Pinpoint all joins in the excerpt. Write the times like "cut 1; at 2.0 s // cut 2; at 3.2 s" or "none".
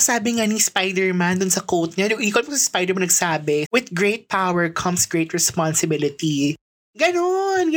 cut 1; at 3.6 s